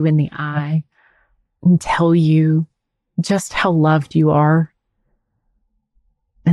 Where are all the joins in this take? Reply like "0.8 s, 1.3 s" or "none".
none